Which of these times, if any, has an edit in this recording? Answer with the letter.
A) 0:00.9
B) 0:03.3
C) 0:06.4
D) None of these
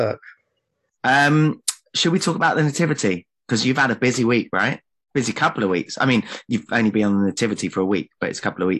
A